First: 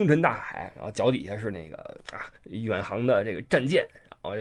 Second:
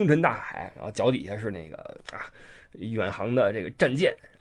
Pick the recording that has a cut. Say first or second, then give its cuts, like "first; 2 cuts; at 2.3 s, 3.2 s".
first; 1 cut; at 2.4 s